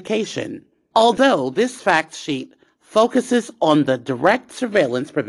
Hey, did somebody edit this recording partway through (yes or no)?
yes